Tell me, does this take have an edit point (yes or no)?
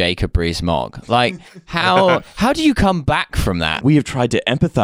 yes